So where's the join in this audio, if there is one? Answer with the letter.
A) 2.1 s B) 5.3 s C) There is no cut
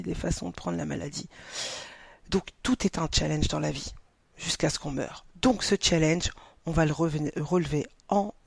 C